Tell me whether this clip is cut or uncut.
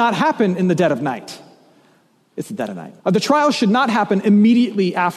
cut